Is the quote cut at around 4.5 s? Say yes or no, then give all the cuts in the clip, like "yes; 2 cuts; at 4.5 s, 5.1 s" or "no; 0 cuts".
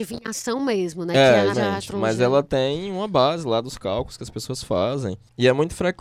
no; 1 cut; at 1.5 s